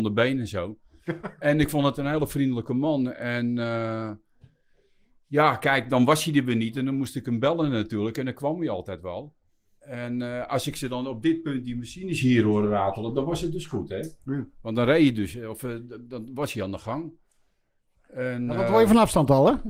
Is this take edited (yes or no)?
no